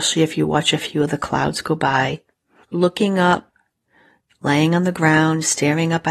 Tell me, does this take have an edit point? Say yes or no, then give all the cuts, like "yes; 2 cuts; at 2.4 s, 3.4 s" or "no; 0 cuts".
yes; 1 cut; at 2.6 s